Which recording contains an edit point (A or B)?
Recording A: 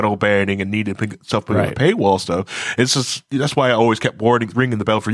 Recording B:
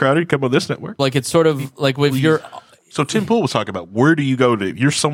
B